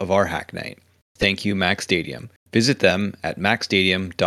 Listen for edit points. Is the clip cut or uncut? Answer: uncut